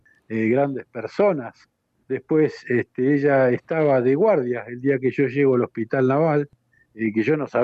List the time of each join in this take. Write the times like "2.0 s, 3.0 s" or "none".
2.0 s